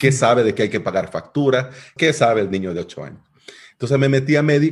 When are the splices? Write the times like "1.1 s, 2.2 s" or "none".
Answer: 2.0 s